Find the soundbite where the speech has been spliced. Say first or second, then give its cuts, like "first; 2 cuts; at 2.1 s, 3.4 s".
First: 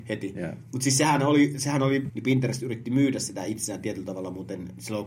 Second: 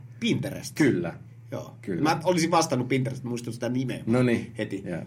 first; 1 cut; at 2.1 s